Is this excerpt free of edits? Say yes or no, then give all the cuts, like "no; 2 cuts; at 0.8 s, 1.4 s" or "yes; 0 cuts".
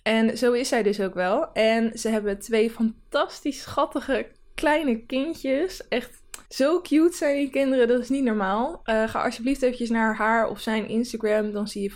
no; 1 cut; at 6.4 s